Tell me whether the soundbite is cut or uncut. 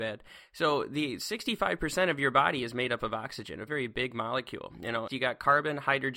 cut